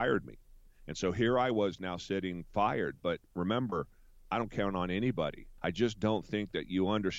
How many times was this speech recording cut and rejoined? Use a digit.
1